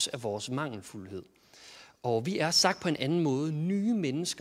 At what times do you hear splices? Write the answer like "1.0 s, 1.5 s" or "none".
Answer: none